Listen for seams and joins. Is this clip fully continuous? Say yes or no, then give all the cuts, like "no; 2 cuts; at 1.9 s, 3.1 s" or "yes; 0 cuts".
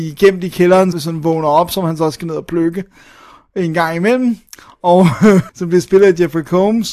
no; 2 cuts; at 0.9 s, 5.5 s